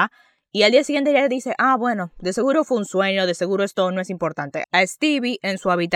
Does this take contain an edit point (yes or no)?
yes